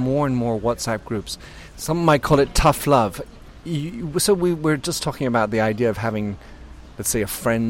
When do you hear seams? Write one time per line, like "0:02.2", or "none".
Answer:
0:01.7